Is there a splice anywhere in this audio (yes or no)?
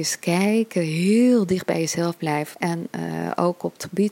yes